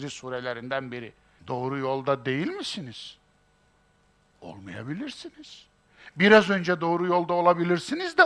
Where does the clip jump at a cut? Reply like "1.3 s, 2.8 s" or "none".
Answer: 1.4 s